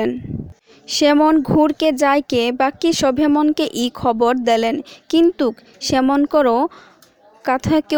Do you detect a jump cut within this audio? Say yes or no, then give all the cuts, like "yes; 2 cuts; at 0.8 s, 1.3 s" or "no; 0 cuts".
no; 0 cuts